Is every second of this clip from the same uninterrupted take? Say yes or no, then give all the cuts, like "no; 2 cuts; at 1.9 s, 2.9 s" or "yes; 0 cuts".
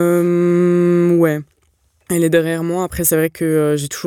yes; 0 cuts